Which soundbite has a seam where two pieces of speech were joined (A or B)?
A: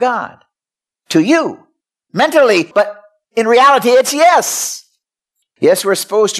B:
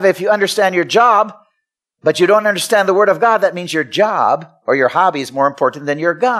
A